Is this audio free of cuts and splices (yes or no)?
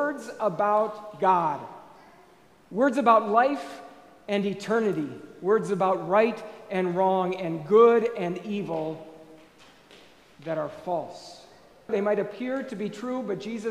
no